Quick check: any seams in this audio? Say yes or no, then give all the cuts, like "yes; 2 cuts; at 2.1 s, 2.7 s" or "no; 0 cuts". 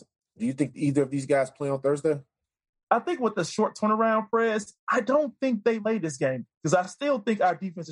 no; 0 cuts